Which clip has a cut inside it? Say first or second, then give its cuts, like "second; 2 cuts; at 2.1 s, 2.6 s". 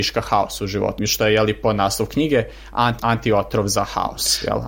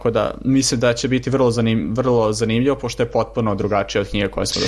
first; 2 cuts; at 1.0 s, 3.0 s